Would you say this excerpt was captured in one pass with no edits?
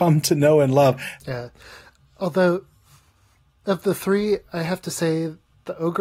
no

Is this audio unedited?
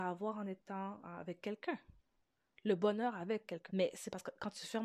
no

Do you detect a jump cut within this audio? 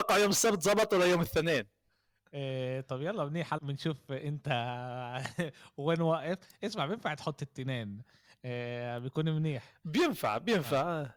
yes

